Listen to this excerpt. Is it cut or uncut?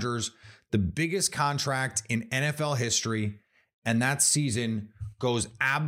uncut